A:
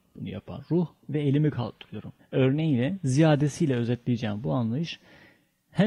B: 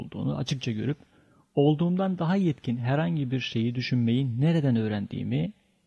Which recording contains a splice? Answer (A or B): A